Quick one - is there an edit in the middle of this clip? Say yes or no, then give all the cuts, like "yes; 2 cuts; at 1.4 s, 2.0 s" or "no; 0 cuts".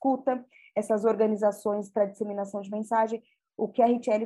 no; 0 cuts